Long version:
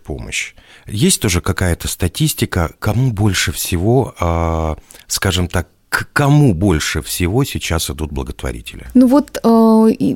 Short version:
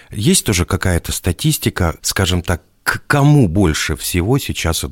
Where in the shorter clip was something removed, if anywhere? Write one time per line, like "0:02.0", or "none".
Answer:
0:02.0